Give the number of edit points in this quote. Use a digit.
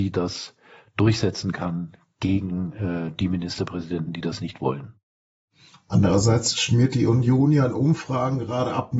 0